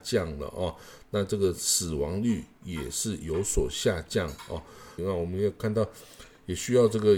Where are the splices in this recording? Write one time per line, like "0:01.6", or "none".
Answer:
0:05.0